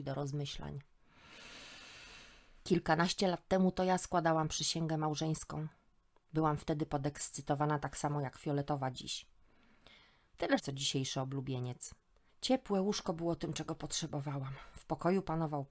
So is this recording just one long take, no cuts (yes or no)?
no